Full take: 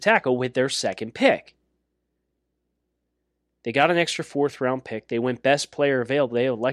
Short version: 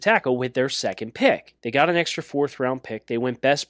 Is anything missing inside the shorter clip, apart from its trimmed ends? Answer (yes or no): yes